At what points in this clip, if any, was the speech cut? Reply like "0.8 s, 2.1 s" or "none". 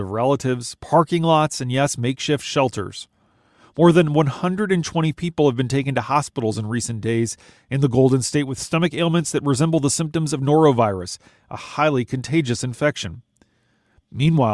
none